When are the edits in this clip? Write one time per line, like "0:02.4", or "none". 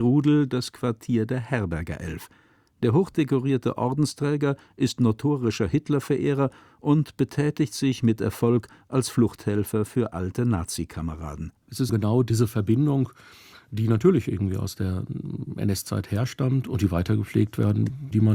0:11.9